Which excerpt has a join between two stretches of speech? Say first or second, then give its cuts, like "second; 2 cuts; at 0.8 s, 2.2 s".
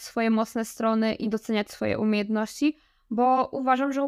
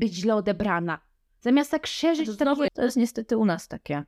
second; 1 cut; at 2.7 s